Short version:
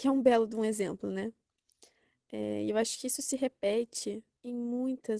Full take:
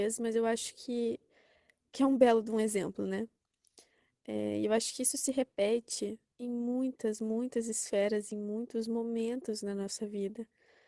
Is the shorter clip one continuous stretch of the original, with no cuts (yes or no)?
yes